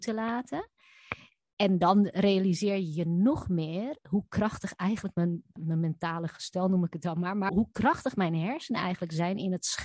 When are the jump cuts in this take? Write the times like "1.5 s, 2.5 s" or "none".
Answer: 5.6 s, 7.5 s